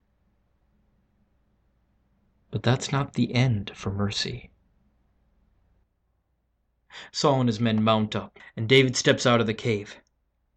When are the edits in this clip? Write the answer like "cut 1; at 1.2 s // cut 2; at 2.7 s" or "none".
cut 1; at 8.4 s